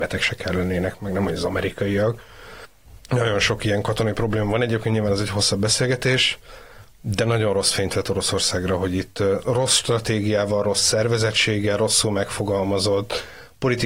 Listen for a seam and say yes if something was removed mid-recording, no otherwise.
no